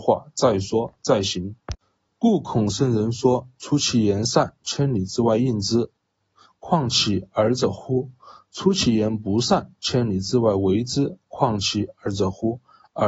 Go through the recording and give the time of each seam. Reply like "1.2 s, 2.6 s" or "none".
none

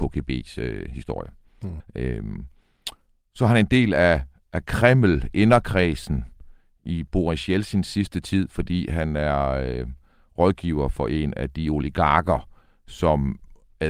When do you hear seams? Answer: 1.8 s

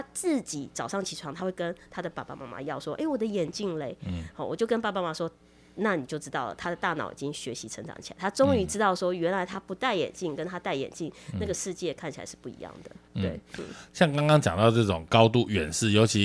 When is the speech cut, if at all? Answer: none

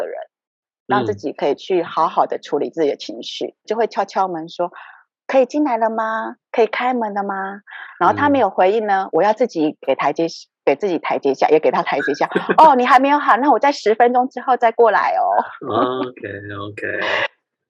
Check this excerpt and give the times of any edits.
3.6 s

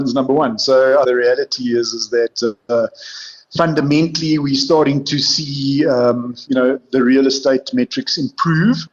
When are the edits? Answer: 1.0 s

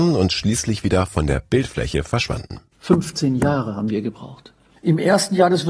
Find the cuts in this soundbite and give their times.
4.8 s

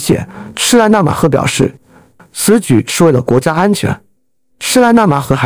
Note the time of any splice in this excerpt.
2.2 s

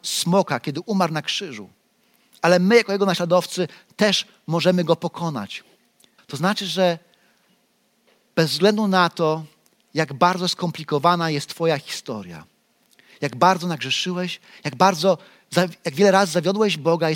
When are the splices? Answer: 6.2 s

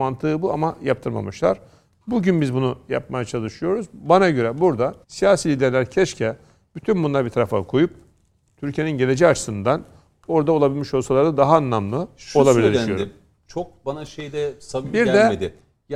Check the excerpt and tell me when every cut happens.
5.0 s

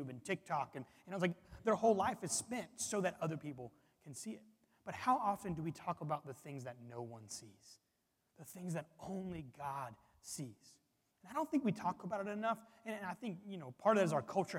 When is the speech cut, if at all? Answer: none

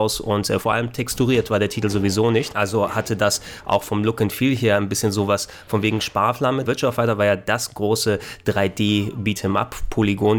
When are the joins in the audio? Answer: 6.6 s

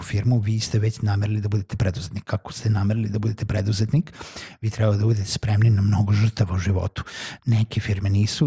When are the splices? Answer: 7.4 s

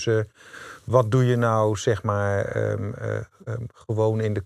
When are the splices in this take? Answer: none

